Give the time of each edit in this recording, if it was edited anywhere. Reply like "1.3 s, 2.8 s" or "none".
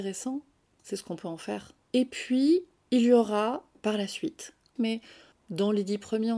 1.8 s, 4.8 s